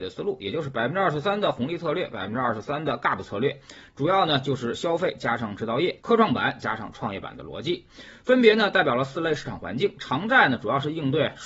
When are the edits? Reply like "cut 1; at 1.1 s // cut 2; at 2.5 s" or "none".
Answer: cut 1; at 6.0 s